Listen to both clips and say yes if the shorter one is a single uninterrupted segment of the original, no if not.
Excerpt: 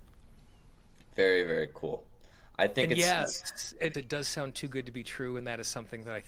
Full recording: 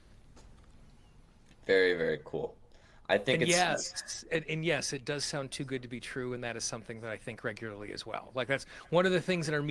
no